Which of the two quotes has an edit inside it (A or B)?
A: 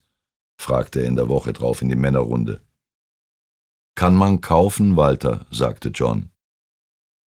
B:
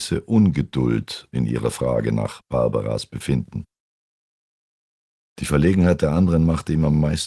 B